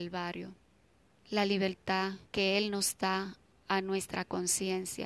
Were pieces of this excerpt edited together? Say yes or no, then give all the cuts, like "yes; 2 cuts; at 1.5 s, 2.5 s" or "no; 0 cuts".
yes; 2 cuts; at 1.2 s, 2.3 s